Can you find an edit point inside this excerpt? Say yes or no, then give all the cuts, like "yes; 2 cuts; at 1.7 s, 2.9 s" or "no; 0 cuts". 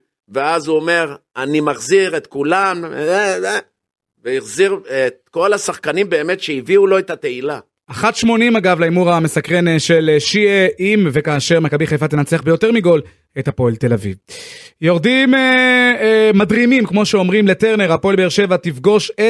no; 0 cuts